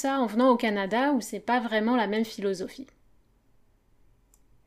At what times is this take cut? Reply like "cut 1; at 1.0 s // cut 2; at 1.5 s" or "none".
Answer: none